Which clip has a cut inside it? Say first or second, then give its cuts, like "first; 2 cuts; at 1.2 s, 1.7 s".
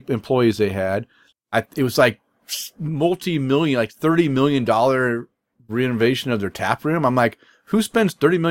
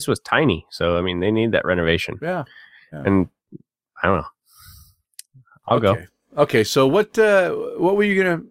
first; 1 cut; at 1.3 s